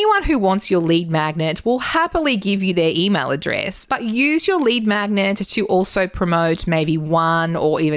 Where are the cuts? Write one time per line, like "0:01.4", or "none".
0:03.9